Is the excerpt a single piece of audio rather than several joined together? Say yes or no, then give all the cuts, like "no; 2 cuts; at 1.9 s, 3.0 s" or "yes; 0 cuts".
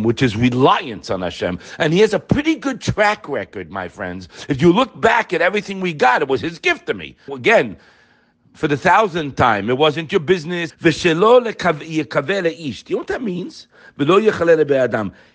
no; 2 cuts; at 7.3 s, 10.7 s